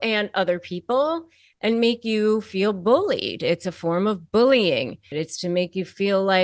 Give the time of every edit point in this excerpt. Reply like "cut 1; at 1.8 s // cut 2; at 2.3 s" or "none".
cut 1; at 5.1 s